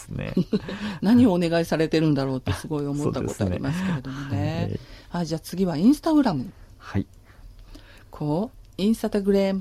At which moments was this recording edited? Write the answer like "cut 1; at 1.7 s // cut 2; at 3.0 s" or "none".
cut 1; at 7.4 s